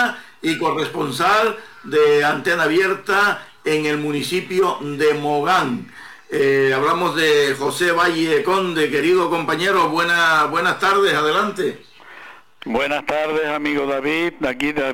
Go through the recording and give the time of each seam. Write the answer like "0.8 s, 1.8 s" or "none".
none